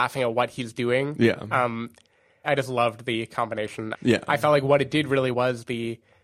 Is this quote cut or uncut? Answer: cut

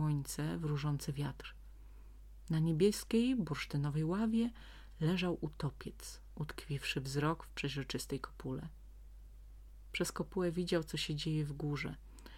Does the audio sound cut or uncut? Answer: uncut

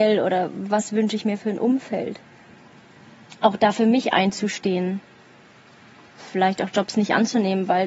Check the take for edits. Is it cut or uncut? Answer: uncut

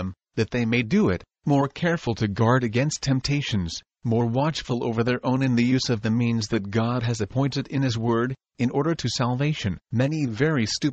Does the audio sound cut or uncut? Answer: cut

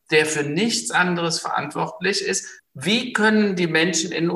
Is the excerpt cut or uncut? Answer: cut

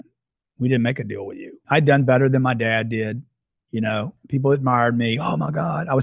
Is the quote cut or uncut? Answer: cut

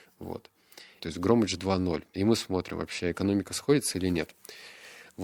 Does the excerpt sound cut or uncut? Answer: cut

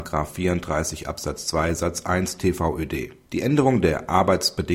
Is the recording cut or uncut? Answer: cut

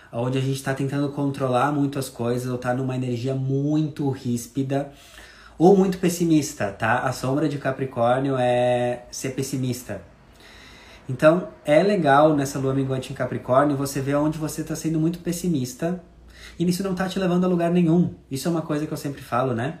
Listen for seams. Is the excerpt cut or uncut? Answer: uncut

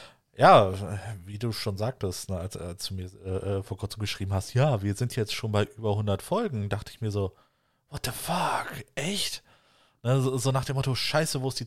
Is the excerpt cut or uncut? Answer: uncut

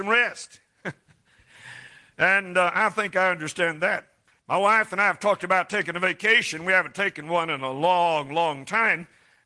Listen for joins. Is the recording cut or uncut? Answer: uncut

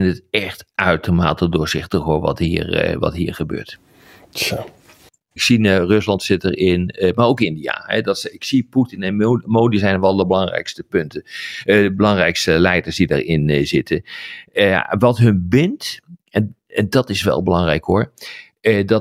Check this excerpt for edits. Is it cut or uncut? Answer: cut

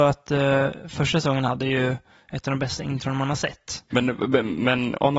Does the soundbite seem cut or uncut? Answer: cut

